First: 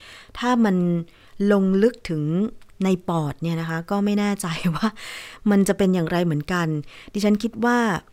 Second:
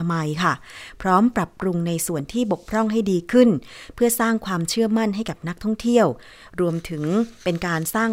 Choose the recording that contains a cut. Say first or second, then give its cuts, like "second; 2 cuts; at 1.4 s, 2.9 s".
first; 1 cut; at 2.7 s